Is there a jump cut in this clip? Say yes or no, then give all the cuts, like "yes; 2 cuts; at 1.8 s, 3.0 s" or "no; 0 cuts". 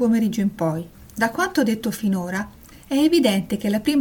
yes; 1 cut; at 0.9 s